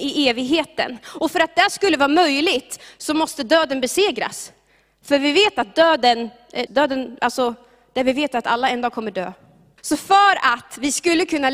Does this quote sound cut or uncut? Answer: cut